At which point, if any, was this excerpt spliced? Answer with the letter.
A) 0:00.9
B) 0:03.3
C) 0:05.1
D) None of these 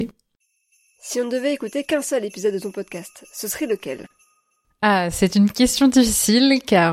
D